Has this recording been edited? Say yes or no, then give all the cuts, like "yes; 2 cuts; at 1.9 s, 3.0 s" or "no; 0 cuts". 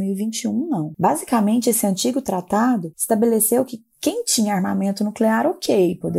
no; 0 cuts